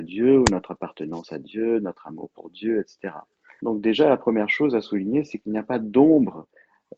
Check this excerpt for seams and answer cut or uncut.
cut